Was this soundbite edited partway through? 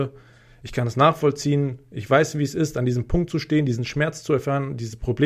no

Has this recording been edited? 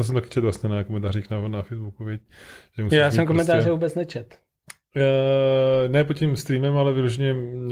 no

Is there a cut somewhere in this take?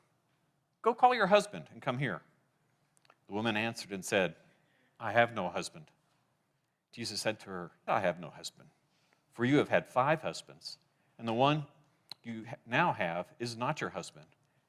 yes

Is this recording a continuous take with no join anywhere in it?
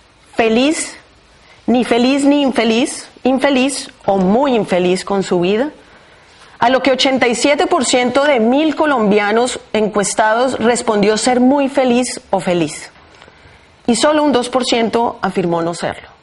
yes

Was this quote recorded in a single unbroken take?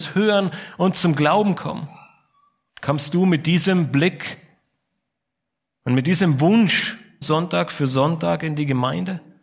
no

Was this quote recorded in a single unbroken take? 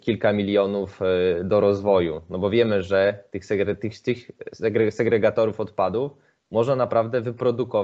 yes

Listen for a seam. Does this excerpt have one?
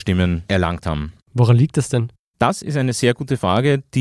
yes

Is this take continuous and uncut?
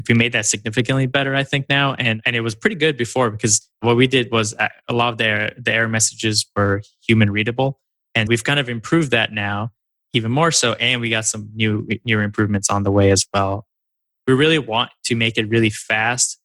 no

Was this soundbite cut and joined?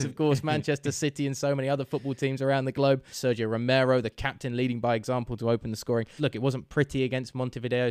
yes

